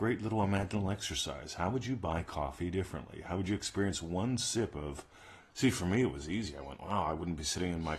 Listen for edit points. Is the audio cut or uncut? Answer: cut